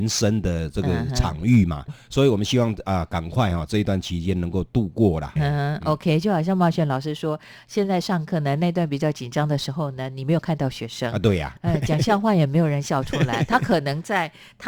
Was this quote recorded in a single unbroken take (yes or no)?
no